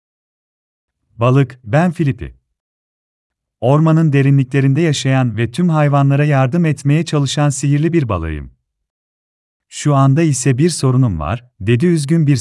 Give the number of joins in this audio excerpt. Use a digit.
1